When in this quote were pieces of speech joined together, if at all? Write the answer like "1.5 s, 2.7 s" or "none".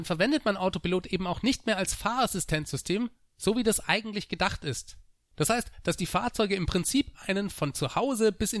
5.2 s